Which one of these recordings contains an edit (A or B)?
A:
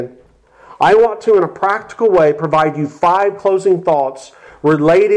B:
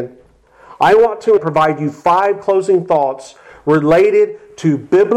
B